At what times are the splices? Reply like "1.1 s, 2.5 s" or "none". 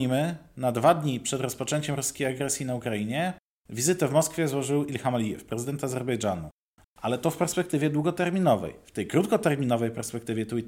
6.8 s